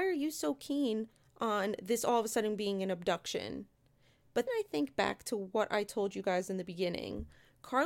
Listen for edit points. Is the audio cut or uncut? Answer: cut